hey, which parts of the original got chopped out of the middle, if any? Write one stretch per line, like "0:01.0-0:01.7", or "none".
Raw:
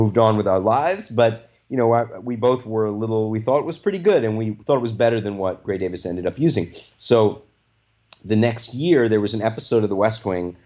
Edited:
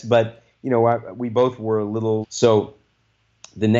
0:03.3-0:06.9